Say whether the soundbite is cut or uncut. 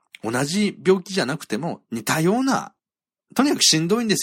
uncut